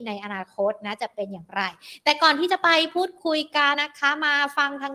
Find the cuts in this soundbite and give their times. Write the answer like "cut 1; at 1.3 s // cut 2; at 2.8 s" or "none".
cut 1; at 3.7 s